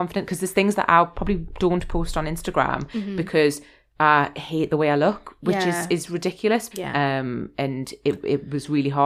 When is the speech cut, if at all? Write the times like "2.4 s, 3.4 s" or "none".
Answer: 6.7 s